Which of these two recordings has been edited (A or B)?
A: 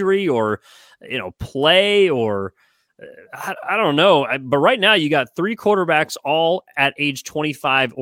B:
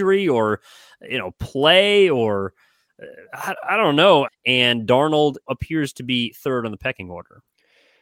B